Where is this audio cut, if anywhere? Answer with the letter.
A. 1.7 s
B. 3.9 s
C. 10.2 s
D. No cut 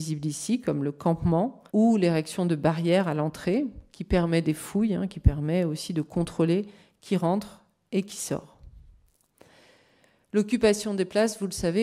A